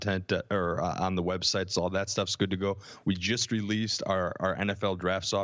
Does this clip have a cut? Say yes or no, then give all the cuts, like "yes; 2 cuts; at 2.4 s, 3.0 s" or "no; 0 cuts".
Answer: no; 0 cuts